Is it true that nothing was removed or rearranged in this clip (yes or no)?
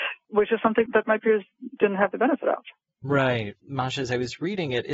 no